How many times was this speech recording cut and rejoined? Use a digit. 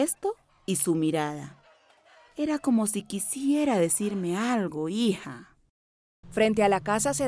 1